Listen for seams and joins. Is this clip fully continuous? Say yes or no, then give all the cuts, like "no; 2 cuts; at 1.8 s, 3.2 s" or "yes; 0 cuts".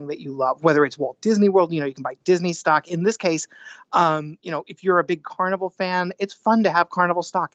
yes; 0 cuts